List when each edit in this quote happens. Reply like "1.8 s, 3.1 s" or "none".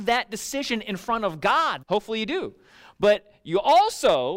1.8 s